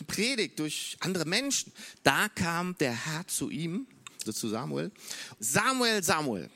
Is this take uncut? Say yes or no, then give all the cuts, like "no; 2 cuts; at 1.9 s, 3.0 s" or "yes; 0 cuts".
no; 3 cuts; at 1.9 s, 4.3 s, 5.4 s